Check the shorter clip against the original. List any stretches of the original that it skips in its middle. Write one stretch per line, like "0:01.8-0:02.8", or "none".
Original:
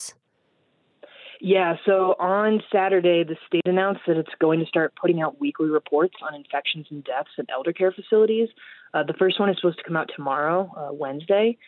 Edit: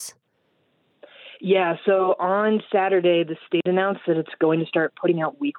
none